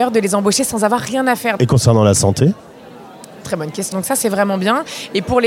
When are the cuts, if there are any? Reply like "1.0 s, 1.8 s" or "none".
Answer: 1.6 s, 3.9 s